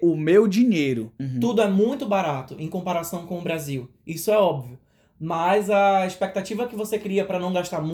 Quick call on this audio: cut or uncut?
cut